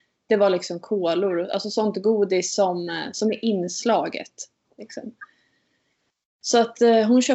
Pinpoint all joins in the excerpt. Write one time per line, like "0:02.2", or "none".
0:04.6